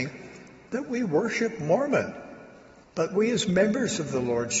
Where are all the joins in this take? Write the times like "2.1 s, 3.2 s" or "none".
2.8 s